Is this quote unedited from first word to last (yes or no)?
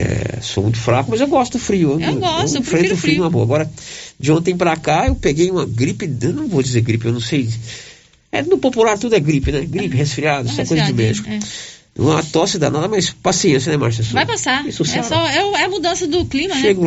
yes